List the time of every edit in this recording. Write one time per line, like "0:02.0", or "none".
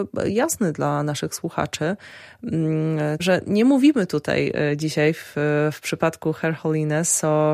0:03.2